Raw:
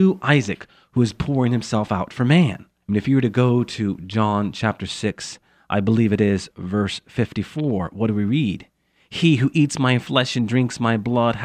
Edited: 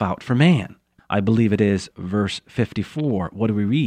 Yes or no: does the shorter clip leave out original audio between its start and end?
yes